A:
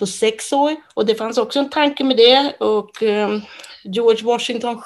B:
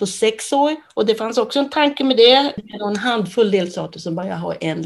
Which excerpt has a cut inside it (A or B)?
B